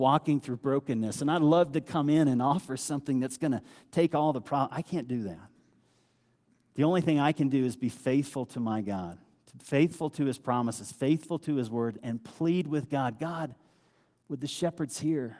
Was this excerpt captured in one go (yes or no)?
yes